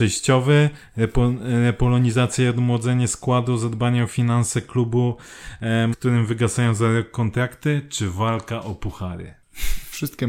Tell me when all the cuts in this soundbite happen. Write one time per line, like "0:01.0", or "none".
0:05.9